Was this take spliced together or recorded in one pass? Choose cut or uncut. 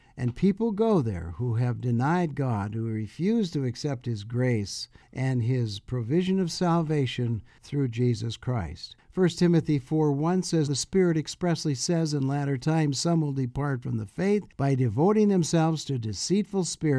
cut